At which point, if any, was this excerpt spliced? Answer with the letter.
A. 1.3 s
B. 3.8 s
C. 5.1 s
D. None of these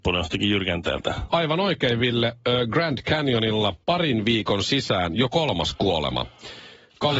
B